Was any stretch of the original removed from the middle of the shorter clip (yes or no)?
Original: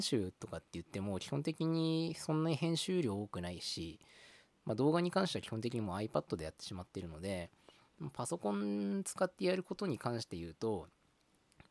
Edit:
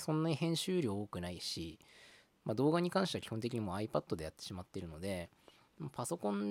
no